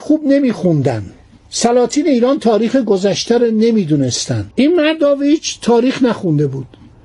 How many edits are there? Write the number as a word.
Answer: one